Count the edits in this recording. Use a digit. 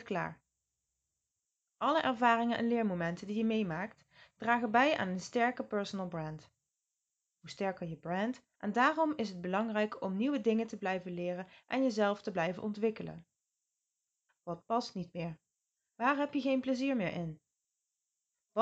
3